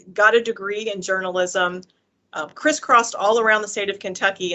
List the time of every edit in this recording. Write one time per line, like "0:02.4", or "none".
none